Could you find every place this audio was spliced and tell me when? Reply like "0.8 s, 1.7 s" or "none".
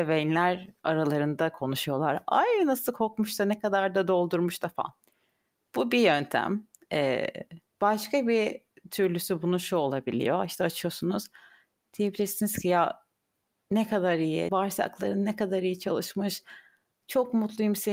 14.5 s